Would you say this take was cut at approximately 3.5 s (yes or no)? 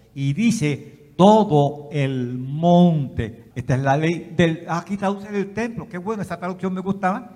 yes